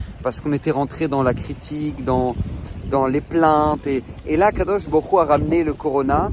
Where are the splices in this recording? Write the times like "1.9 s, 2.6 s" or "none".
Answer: none